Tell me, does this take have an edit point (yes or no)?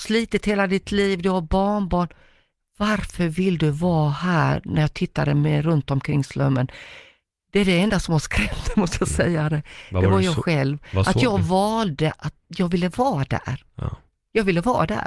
no